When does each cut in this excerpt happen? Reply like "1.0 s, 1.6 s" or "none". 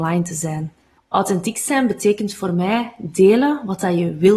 1.0 s